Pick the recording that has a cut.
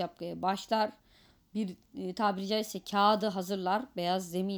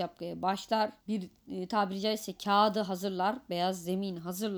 second; 1 cut; at 1.0 s

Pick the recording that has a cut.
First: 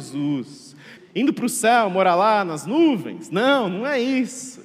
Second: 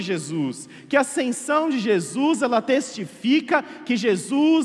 first; 1 cut; at 1.0 s

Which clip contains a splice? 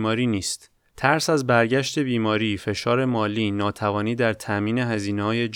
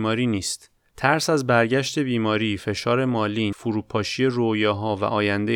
second; 1 cut; at 3.5 s

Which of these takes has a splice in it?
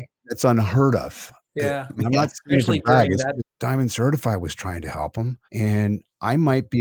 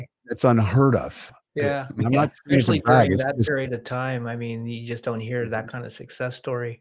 first; 2 cuts; at 3.4 s, 5.4 s

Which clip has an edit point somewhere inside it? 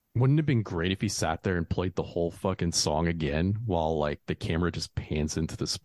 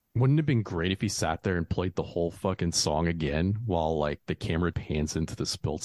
second; 1 cut; at 4.7 s

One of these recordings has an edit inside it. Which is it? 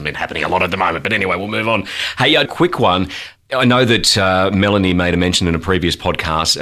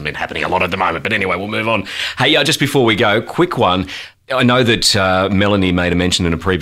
first; 1 cut; at 2.4 s

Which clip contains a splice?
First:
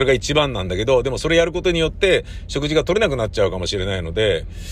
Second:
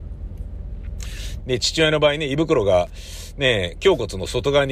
second; 1 cut; at 1.4 s

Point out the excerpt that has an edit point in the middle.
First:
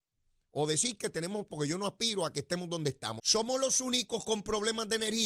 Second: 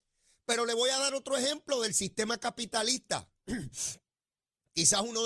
first; 2 cuts; at 1.5 s, 3.2 s

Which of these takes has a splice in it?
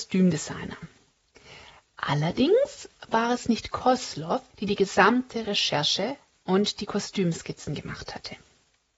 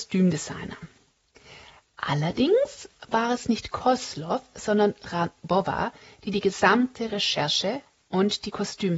first; 1 cut; at 4.5 s

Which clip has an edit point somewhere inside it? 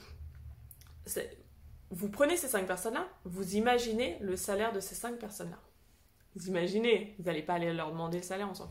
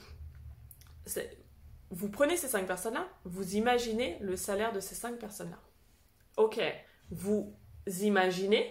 second; 1 cut; at 6.3 s

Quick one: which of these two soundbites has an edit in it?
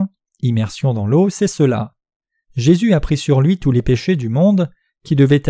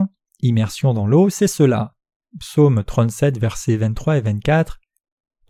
second; 1 cut; at 2.2 s

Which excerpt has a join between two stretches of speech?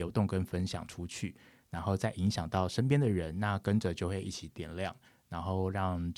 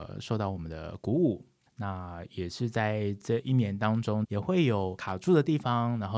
second; 2 cuts; at 1.7 s, 4.2 s

